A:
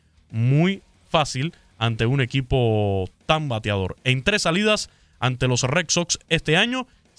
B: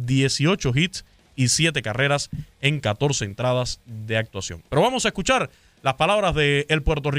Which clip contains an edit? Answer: B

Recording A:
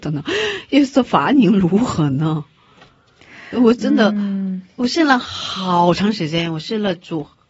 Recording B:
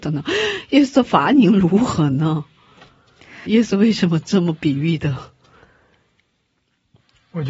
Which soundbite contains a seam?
B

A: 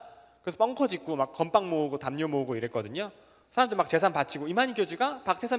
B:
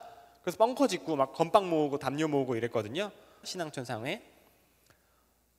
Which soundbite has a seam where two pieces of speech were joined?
B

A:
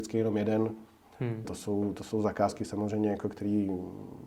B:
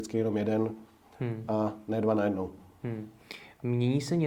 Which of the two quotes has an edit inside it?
A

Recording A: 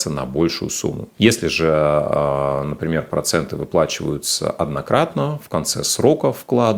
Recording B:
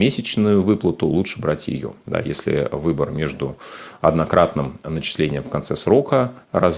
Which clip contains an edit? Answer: A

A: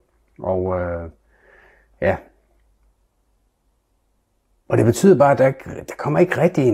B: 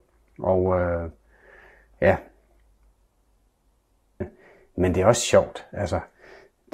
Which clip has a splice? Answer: B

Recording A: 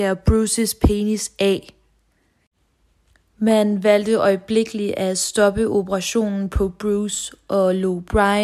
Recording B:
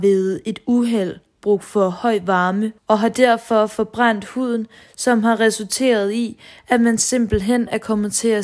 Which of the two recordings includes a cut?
B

